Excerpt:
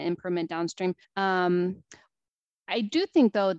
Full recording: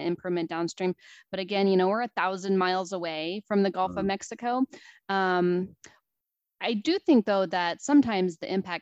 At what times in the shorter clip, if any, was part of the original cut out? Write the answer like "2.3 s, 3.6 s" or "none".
1.0 s